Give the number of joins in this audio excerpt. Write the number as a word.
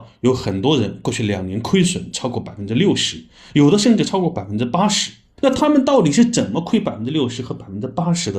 one